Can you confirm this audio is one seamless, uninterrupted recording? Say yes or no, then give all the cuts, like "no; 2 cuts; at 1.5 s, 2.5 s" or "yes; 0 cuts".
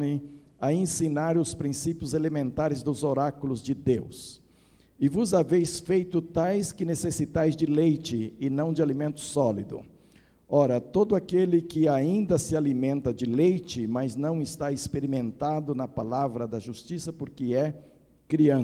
yes; 0 cuts